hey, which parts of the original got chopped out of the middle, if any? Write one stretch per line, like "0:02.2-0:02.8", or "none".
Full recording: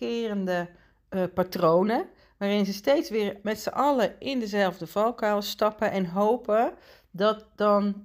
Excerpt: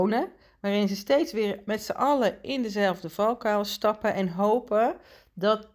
none